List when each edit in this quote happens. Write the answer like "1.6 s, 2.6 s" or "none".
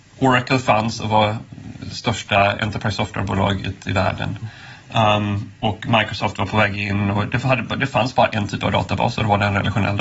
none